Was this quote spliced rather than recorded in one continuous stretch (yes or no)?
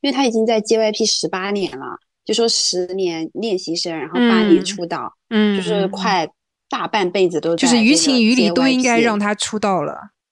no